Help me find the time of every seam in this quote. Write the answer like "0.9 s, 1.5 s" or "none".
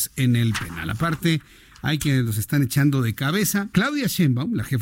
3.7 s